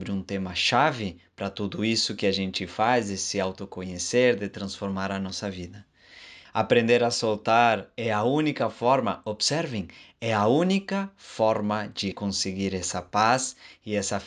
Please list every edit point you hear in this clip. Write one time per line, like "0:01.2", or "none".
0:06.5
0:12.1